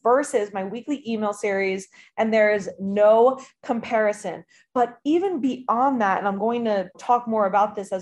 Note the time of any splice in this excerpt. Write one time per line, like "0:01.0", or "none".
0:06.9